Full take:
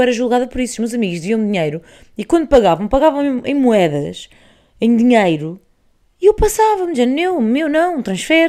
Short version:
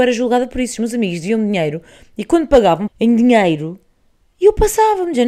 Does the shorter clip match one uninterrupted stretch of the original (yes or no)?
no